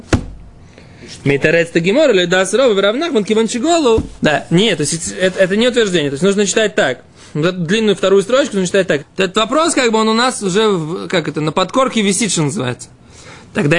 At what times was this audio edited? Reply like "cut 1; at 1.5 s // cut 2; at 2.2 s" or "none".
cut 1; at 4.2 s // cut 2; at 9.0 s